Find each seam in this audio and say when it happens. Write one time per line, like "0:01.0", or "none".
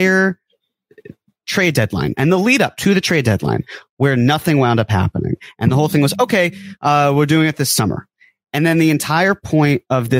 none